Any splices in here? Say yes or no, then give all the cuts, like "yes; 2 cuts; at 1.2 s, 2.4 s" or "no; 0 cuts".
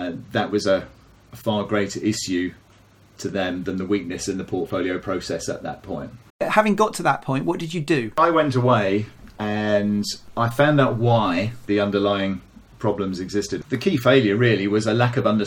yes; 2 cuts; at 6.3 s, 13.6 s